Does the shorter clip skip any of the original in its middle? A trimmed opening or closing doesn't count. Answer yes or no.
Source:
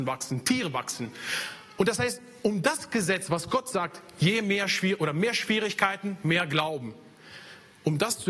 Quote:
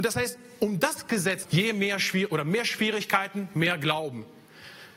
yes